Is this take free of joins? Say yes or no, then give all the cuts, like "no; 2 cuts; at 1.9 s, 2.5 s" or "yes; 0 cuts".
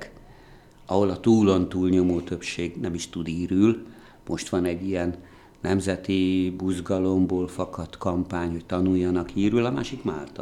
yes; 0 cuts